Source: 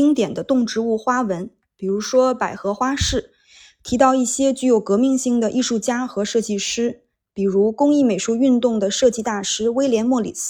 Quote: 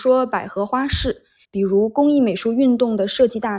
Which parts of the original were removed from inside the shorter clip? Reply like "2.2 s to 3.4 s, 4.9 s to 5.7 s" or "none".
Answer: 3.5 s to 7.2 s

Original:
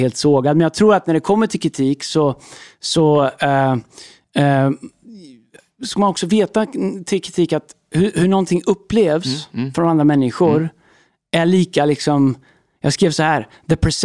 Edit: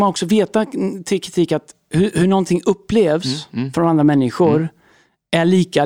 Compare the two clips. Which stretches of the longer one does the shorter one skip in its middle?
none

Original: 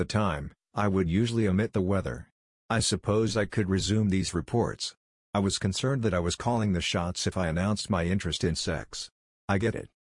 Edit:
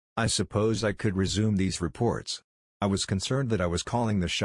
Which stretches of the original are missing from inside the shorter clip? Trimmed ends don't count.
none

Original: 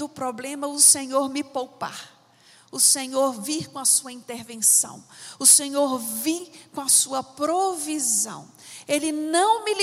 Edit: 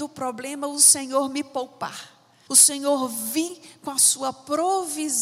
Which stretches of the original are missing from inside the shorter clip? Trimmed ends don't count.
2.5 s to 5.4 s

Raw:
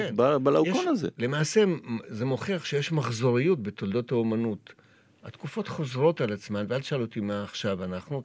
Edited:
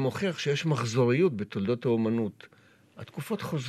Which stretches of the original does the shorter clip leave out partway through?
none

